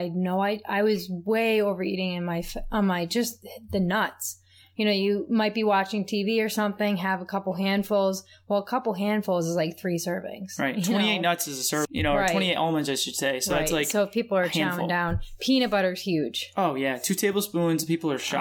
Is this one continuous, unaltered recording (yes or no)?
no